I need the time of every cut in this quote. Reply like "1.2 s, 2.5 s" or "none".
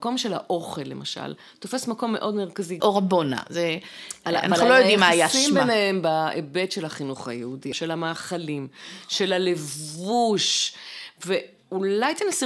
2.8 s, 7.7 s

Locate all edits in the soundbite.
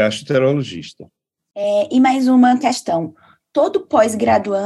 none

